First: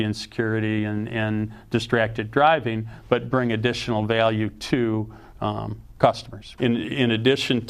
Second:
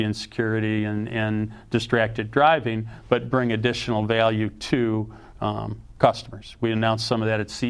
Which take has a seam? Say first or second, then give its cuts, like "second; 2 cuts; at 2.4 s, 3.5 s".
first; 1 cut; at 6.6 s